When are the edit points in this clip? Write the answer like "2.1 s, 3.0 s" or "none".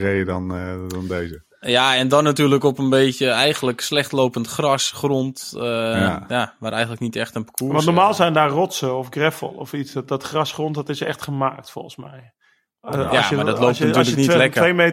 none